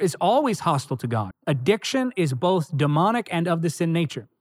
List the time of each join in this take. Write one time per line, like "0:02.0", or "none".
0:01.3